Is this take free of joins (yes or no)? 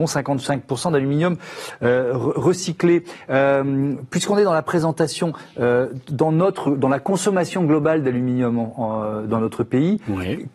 yes